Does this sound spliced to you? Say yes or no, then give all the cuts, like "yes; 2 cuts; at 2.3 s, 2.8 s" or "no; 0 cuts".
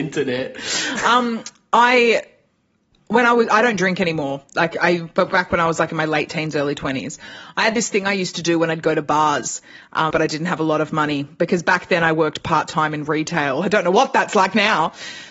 yes; 1 cut; at 10.1 s